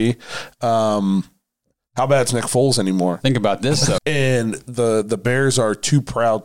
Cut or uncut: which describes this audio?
cut